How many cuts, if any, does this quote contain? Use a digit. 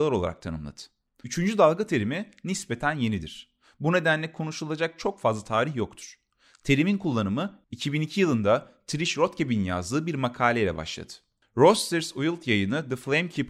1